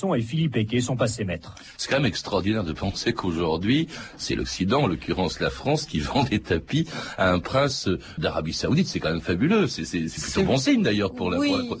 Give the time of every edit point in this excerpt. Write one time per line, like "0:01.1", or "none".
0:08.2